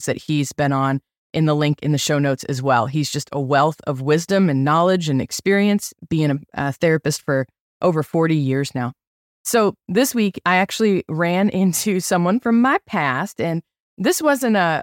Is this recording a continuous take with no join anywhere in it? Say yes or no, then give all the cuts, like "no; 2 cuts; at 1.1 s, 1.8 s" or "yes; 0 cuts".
yes; 0 cuts